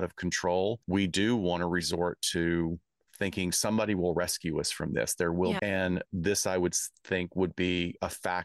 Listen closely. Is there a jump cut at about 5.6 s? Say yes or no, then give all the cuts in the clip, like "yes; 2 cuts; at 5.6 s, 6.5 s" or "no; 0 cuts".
yes; 1 cut; at 5.6 s